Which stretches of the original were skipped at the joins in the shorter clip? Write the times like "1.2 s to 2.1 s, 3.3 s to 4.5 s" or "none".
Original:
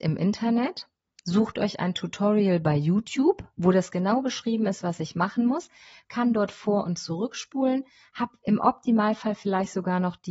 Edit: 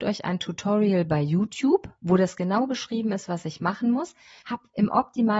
6.0 s to 8.1 s